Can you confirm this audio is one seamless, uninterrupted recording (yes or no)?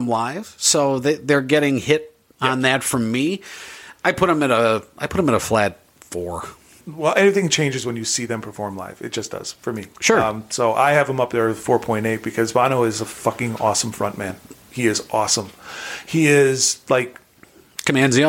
yes